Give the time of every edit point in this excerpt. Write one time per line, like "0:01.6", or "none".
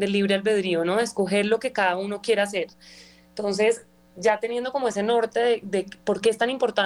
none